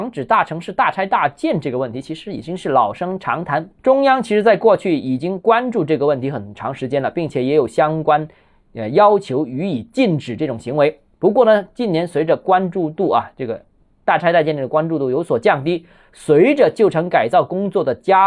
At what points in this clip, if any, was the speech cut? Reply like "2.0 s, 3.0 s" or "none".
none